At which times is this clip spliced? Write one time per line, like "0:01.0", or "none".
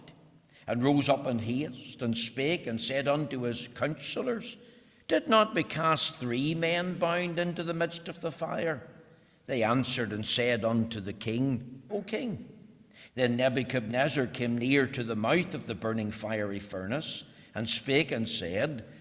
0:11.9
0:13.1